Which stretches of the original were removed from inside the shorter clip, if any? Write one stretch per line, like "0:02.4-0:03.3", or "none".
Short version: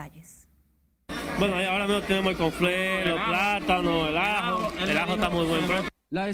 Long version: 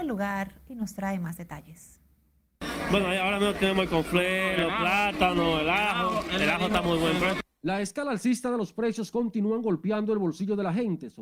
none